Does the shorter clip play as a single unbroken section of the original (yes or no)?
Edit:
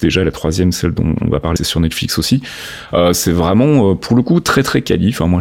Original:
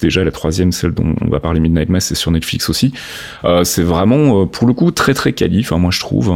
no